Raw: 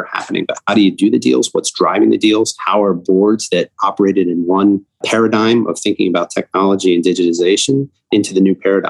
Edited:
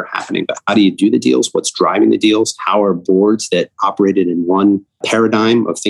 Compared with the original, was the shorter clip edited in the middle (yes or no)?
no